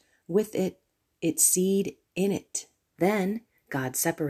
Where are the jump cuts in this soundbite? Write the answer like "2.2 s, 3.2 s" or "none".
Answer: 3.0 s